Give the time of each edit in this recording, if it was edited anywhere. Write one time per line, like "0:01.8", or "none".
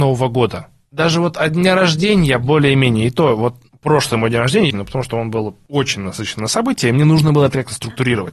0:04.7

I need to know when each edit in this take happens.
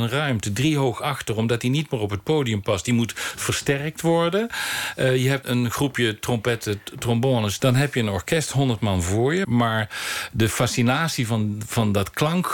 0:05.4
0:07.6
0:09.4

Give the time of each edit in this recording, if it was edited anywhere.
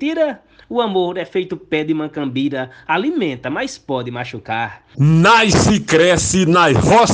0:04.9

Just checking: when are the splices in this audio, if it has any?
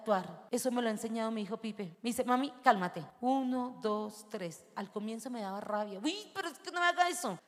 none

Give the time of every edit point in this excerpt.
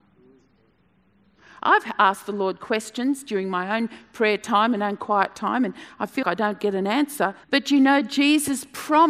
0:06.2
0:07.4

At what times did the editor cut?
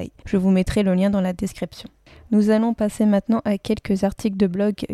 none

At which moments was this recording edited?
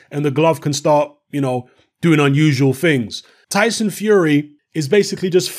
0:03.4
0:04.6

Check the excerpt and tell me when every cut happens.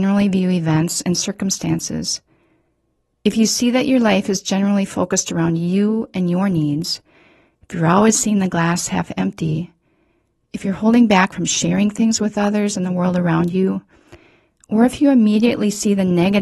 none

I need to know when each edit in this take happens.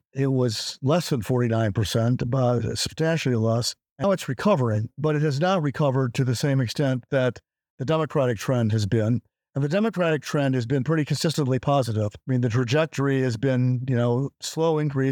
0:04.0

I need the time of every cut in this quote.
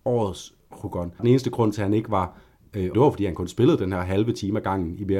0:01.2
0:02.9

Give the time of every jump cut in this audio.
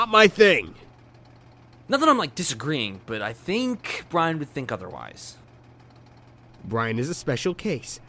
none

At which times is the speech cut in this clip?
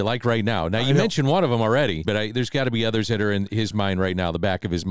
0:02.0

